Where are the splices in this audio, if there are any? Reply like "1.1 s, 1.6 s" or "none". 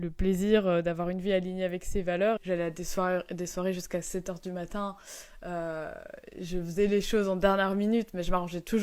2.4 s